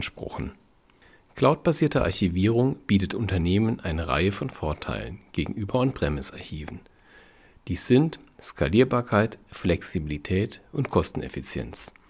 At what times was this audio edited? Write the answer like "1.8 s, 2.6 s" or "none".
none